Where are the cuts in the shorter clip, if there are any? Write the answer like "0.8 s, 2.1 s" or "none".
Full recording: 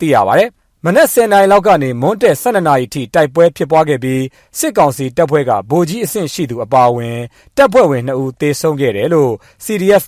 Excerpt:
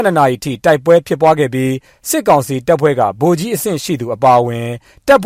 none